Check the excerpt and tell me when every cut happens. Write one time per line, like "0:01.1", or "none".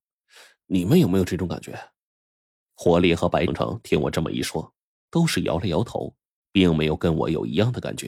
0:03.5